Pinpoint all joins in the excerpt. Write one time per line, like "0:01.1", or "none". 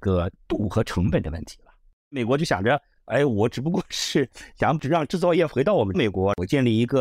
none